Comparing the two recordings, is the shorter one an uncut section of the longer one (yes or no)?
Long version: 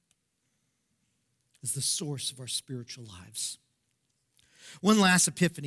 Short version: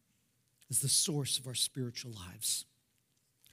yes